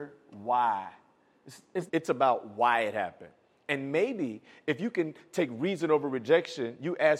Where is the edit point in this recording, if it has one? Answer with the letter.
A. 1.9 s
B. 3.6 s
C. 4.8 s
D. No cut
A